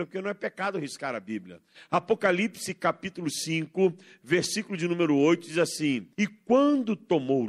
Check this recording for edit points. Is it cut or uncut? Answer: cut